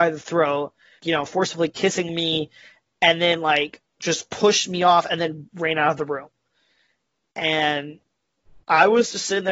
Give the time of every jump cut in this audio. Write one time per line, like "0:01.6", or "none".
0:01.0